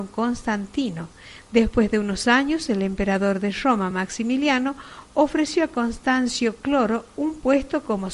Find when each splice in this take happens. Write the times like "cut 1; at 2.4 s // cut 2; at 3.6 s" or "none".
none